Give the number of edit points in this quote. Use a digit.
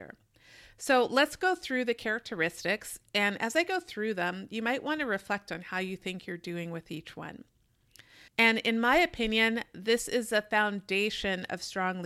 1